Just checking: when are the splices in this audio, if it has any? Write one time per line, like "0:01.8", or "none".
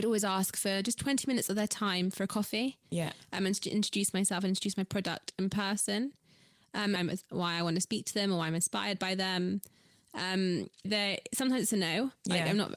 0:07.0
0:10.8